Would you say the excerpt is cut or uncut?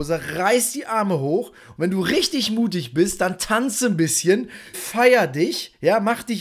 cut